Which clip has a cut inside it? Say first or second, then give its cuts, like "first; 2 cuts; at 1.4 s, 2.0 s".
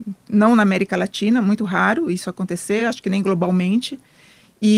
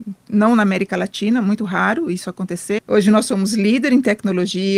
second; 1 cut; at 2.8 s